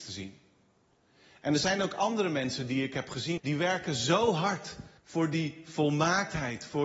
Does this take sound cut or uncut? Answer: cut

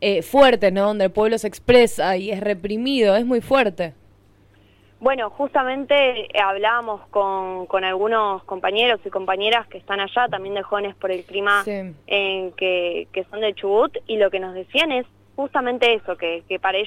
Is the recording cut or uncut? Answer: uncut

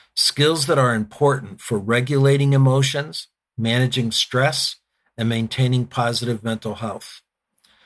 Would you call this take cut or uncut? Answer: uncut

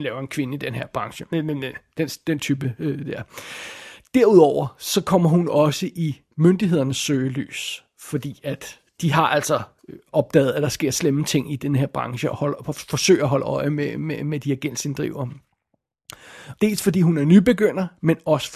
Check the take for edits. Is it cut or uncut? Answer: cut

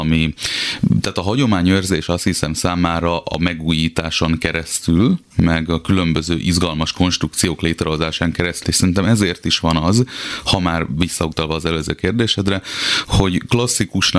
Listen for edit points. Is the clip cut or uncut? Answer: cut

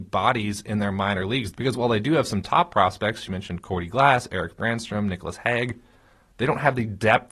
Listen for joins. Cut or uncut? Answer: cut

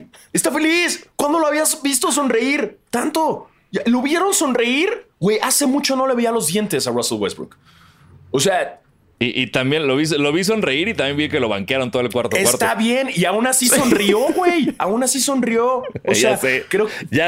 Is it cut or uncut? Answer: uncut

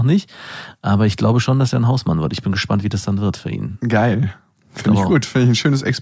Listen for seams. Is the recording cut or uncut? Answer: uncut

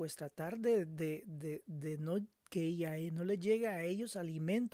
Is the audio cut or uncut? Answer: uncut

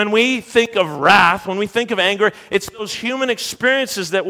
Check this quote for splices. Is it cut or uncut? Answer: uncut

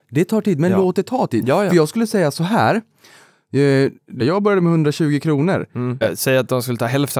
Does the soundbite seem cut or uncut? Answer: cut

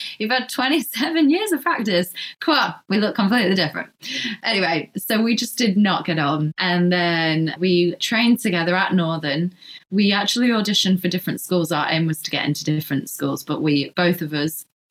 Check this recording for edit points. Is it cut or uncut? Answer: uncut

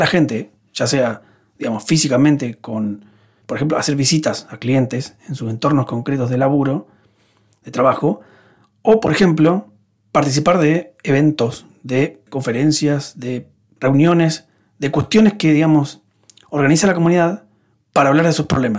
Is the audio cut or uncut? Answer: uncut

